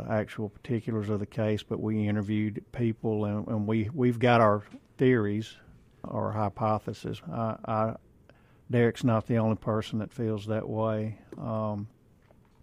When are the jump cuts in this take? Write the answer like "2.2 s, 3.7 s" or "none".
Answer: 6.0 s, 7.2 s